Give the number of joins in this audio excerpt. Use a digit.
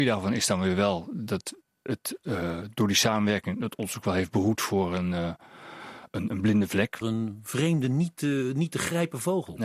1